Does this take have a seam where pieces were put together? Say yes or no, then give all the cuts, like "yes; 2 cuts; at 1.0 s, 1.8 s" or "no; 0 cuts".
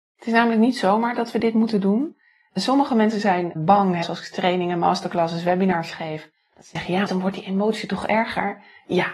yes; 2 cuts; at 4.0 s, 7.1 s